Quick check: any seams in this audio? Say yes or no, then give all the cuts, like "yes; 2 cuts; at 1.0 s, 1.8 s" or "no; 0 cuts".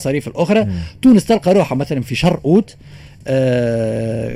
no; 0 cuts